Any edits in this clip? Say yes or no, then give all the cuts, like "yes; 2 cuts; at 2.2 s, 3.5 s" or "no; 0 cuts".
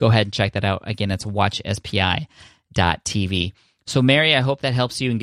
no; 0 cuts